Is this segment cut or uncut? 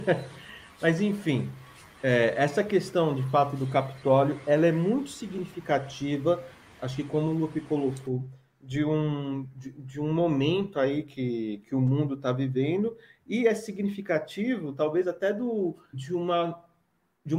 cut